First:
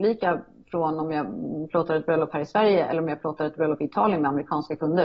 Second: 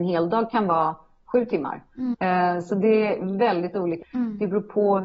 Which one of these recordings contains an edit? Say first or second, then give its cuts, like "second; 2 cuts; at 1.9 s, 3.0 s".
second; 2 cuts; at 2.1 s, 4.0 s